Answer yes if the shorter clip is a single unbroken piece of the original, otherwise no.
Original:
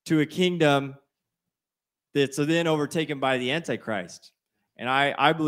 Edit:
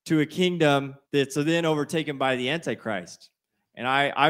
no